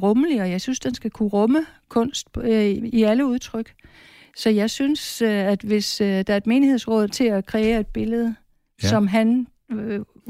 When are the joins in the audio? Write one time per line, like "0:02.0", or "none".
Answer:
0:02.8
0:07.1